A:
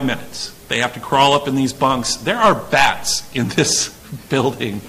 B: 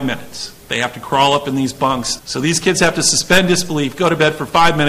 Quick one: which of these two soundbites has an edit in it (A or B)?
B